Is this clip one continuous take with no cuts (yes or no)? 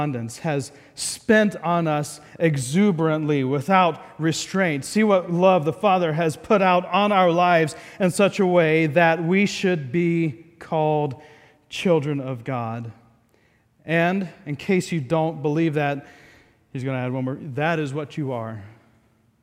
yes